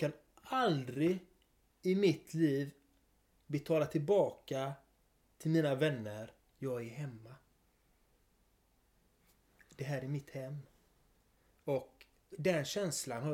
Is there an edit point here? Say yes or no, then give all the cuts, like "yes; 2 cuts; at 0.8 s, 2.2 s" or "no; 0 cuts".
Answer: yes; 1 cut; at 6.4 s